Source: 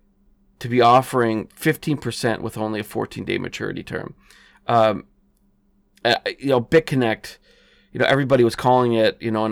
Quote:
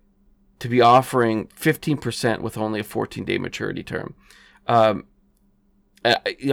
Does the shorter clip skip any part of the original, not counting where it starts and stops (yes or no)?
no